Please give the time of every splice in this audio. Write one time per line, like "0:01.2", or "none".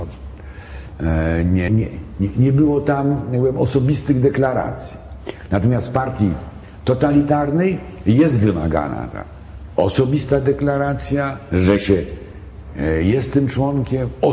0:01.7